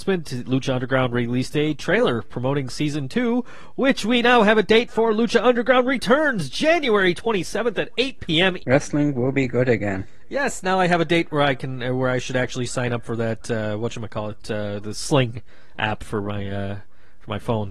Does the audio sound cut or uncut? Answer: cut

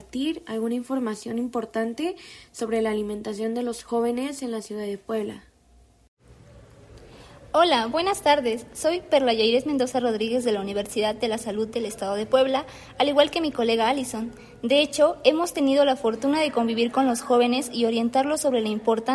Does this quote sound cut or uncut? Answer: uncut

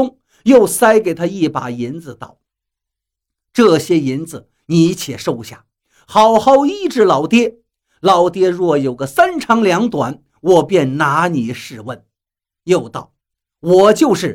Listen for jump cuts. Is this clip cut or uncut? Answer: uncut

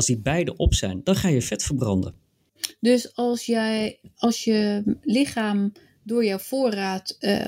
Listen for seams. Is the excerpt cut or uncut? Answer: uncut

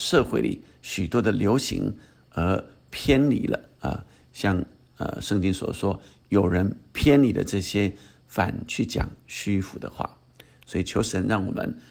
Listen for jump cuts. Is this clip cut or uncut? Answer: uncut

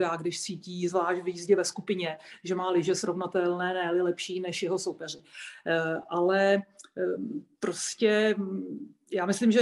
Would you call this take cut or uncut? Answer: uncut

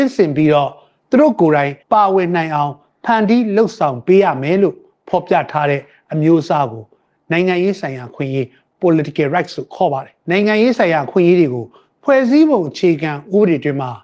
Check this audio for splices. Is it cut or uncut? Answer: cut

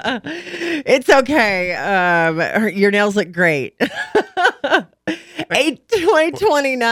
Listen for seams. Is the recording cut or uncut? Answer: uncut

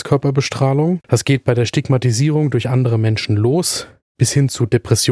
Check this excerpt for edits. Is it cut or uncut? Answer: cut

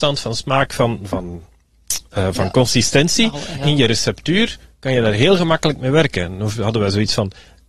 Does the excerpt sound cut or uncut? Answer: cut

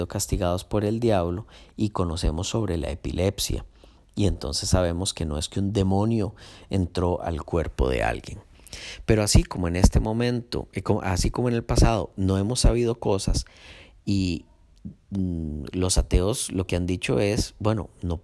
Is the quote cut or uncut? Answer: uncut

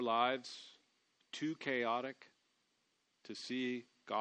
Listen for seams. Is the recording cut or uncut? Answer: cut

